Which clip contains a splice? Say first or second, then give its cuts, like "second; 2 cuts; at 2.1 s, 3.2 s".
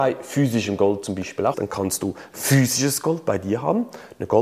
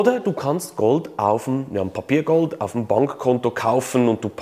first; 1 cut; at 1.5 s